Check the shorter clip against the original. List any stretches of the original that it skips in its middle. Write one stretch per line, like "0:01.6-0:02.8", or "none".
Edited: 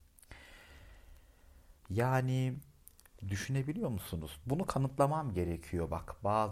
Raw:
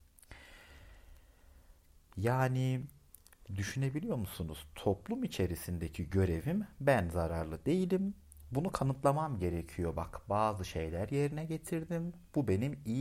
0:01.8-0:02.1
0:04.7-0:08.5